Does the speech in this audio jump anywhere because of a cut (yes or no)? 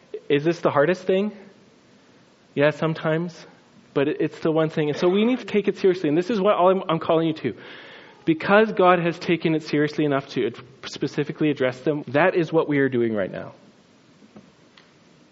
yes